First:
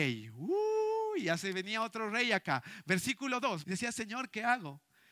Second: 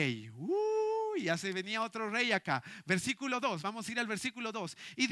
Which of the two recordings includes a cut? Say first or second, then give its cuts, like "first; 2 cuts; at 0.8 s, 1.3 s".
first; 1 cut; at 3.6 s